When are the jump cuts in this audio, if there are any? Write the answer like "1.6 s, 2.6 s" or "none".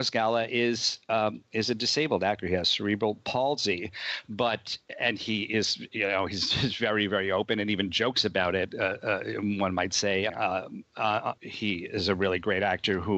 10.3 s, 11.4 s